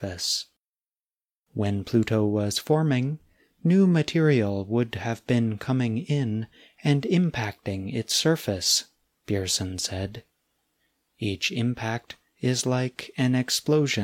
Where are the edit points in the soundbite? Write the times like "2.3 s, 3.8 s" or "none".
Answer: none

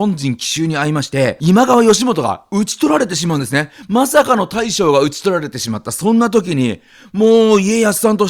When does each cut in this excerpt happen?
none

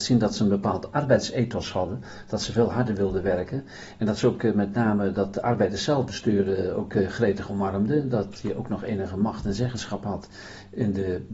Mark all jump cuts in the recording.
none

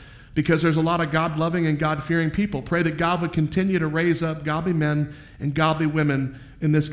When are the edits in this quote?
none

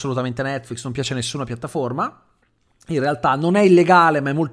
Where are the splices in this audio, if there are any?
none

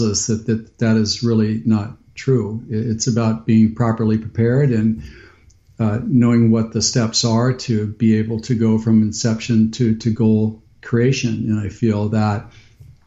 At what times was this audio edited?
none

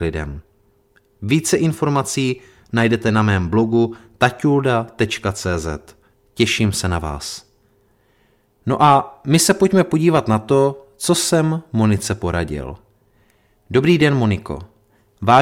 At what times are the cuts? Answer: none

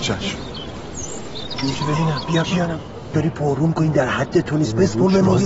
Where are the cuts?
3.1 s

